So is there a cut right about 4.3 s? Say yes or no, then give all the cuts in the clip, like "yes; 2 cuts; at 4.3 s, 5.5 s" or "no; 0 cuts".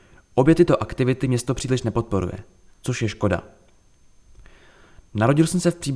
no; 0 cuts